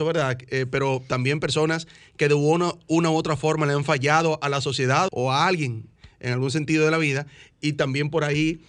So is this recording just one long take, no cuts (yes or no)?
no